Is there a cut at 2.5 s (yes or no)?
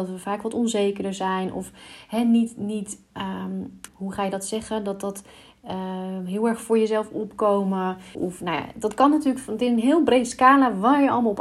no